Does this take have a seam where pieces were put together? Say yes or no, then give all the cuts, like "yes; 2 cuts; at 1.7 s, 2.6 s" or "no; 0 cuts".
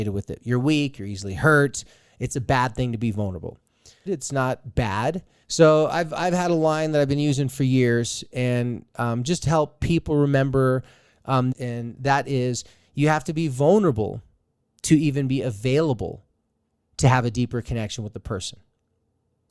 yes; 3 cuts; at 4.1 s, 5.4 s, 11.5 s